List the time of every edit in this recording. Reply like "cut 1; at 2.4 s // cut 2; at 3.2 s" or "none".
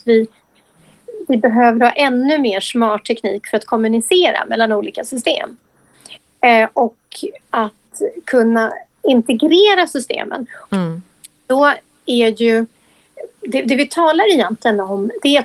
cut 1; at 9.0 s // cut 2; at 10.6 s // cut 3; at 13.4 s